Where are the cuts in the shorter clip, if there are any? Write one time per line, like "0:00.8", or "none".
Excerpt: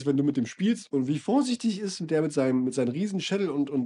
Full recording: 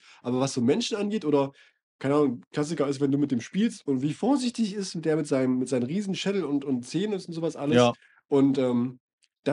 none